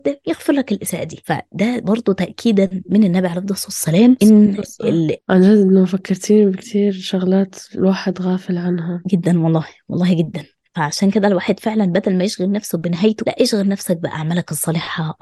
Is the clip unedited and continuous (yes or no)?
no